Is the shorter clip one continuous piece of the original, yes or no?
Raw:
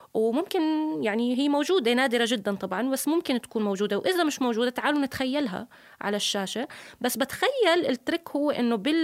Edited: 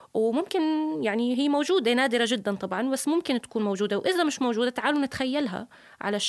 yes